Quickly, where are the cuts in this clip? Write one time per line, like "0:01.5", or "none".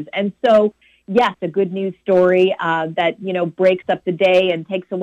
0:01.4